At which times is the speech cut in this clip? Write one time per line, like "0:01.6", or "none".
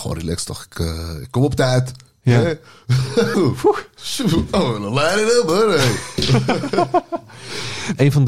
0:03.3